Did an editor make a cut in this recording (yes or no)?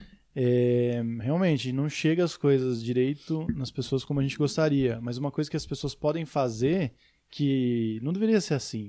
no